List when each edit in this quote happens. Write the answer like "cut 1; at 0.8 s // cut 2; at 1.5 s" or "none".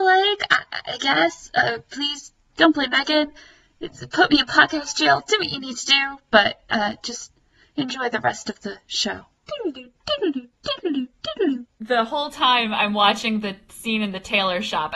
none